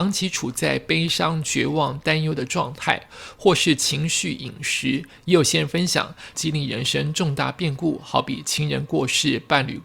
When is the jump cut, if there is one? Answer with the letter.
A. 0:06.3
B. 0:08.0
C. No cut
A